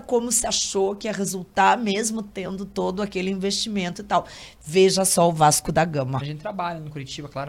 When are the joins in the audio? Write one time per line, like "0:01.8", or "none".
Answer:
0:06.2